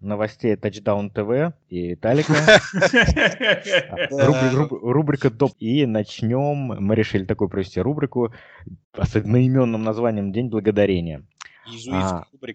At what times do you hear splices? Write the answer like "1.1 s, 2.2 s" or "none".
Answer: 5.5 s